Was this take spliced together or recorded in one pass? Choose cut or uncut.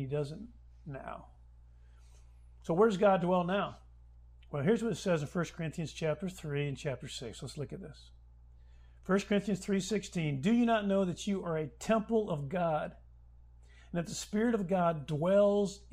uncut